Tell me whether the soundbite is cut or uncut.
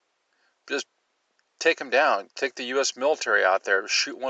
uncut